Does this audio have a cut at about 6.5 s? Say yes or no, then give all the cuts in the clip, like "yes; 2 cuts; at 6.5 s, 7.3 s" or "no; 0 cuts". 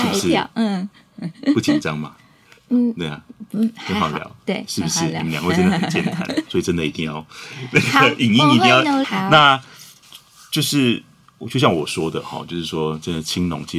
yes; 2 cuts; at 6.5 s, 9.0 s